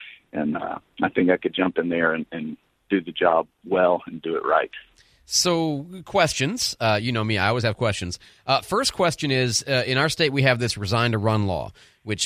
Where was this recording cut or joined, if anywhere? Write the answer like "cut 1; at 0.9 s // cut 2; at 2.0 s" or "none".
none

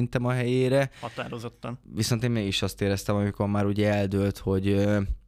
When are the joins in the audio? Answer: cut 1; at 1.8 s

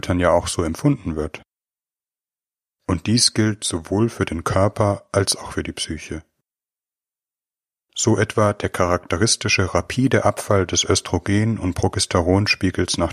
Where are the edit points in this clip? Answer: cut 1; at 2.8 s // cut 2; at 7.8 s

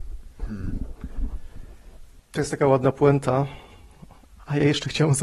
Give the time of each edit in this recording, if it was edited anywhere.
cut 1; at 2.2 s

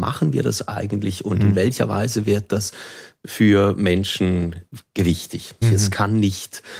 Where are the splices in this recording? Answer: cut 1; at 5.6 s

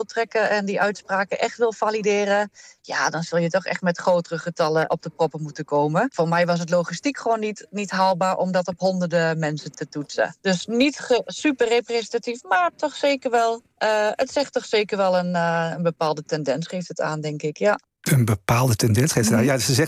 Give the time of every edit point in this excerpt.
cut 1; at 4.9 s

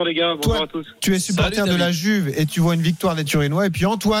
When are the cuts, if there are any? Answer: none

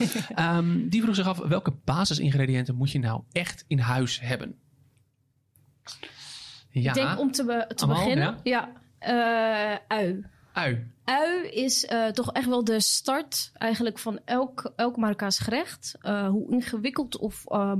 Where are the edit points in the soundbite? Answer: none

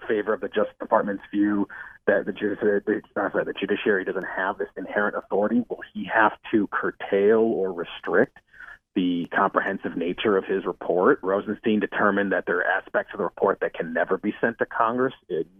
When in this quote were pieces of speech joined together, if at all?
cut 1; at 11.2 s

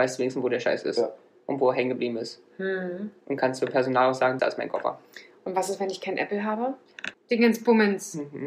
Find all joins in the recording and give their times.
cut 1; at 4.4 s // cut 2; at 7.1 s

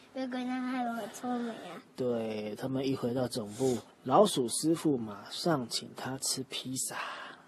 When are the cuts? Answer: cut 1; at 3.9 s

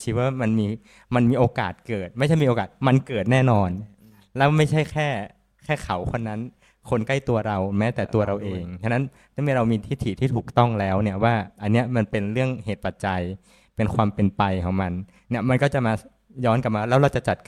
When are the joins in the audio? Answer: none

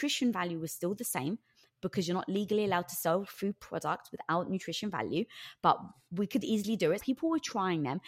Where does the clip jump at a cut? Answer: cut 1; at 7.0 s

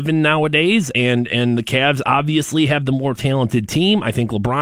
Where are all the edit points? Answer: none

